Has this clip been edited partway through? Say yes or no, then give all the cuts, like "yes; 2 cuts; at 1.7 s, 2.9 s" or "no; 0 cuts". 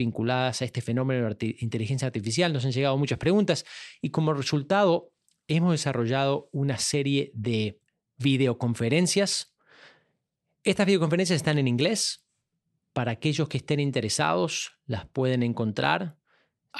no; 0 cuts